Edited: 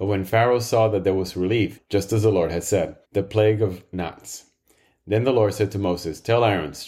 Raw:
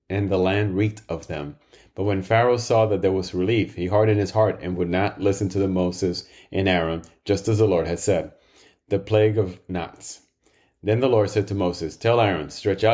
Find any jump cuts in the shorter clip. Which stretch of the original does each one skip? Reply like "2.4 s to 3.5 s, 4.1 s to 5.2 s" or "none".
3.7 s to 7.1 s, 8.4 s to 8.8 s

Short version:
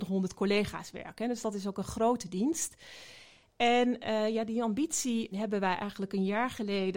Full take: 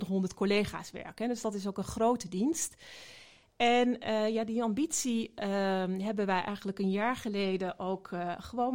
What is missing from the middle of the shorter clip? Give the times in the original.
5.3 s to 6.0 s

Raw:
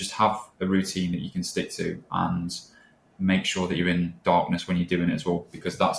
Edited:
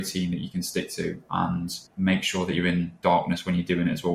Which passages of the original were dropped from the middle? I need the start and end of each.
2.7 s to 3.1 s

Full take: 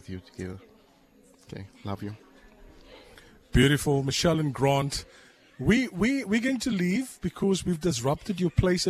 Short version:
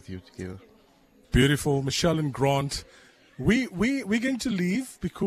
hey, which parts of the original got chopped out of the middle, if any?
1.2 s to 3.4 s

